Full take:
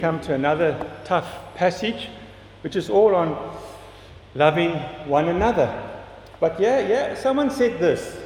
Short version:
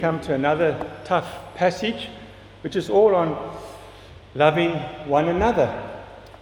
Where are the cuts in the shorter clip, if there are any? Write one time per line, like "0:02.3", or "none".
none